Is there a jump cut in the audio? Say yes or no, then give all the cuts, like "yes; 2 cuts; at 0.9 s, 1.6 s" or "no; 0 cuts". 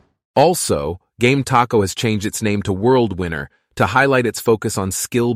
no; 0 cuts